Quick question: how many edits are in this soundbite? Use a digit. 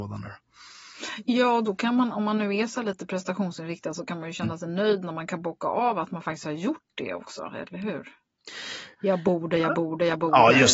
1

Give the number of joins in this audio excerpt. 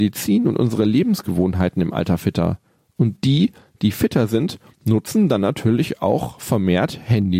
0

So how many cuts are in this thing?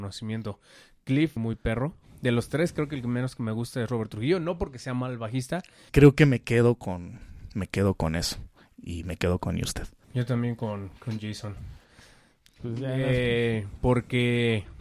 3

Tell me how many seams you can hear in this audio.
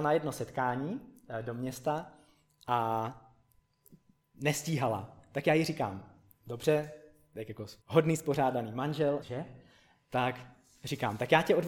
2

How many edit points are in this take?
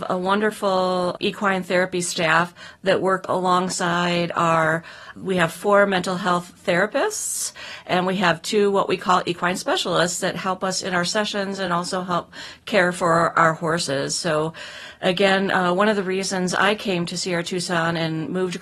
0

